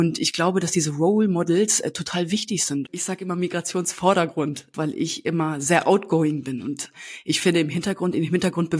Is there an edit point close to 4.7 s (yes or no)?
yes